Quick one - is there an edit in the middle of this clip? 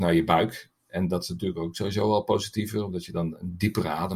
no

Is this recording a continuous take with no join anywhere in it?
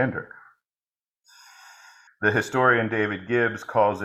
no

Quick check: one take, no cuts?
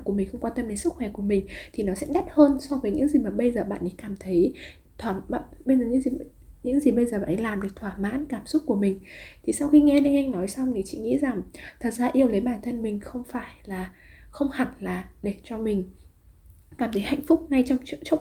no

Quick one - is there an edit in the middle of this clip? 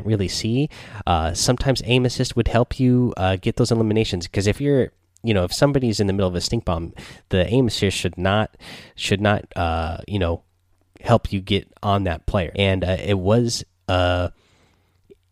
yes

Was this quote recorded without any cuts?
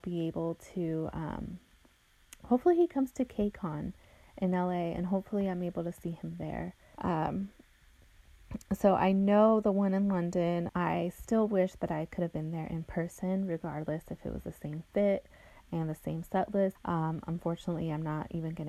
no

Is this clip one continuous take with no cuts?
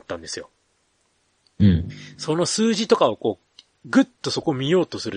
yes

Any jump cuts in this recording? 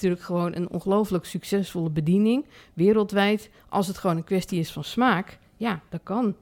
yes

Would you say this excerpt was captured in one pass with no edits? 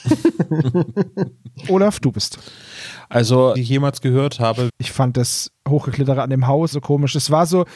no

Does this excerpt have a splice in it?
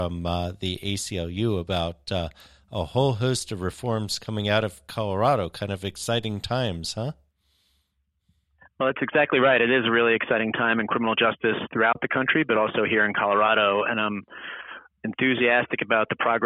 no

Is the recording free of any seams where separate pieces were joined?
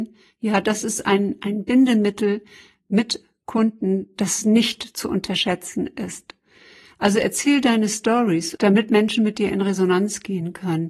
yes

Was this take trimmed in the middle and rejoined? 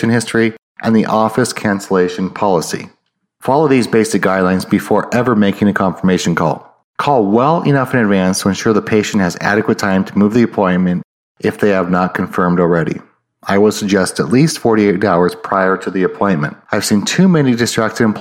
yes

